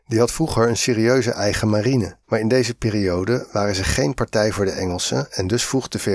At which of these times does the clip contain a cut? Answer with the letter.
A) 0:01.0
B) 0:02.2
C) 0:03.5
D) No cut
B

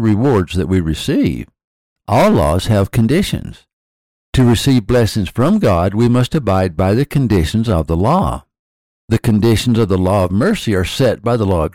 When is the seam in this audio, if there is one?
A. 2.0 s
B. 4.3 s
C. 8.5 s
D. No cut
A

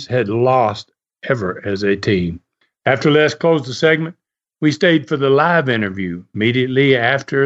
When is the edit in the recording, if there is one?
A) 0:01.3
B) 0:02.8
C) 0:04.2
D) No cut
D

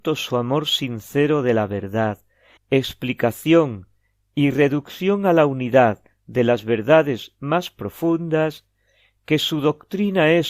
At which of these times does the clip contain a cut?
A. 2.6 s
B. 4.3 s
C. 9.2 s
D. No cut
A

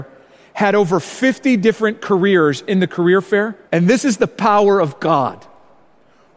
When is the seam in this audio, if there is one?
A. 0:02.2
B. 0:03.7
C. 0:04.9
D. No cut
B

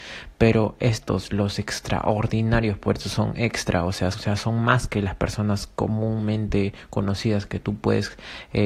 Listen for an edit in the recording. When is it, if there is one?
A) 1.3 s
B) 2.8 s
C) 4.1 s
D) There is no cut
C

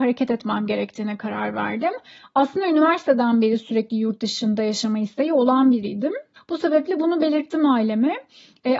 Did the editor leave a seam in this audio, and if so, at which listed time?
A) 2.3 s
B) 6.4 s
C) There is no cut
B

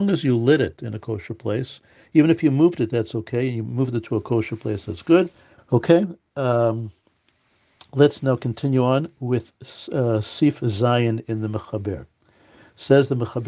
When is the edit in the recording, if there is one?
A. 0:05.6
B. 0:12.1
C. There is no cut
A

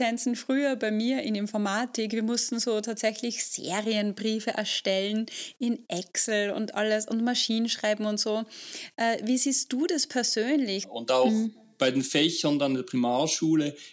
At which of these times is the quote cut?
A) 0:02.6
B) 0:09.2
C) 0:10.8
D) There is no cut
C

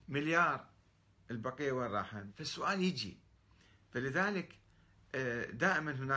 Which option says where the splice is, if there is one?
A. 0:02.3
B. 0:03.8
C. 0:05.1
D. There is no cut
A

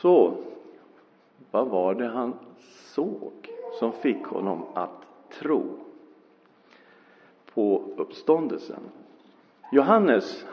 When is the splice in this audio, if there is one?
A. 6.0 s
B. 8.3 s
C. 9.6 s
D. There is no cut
C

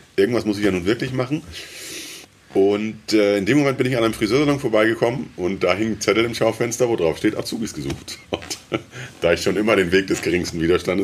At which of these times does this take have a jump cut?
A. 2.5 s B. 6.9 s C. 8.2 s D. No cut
C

